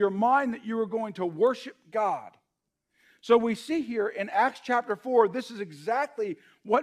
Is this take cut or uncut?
uncut